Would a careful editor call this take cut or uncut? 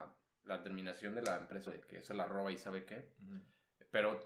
cut